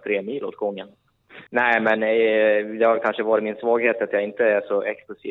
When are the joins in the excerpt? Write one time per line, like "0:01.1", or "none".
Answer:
0:01.5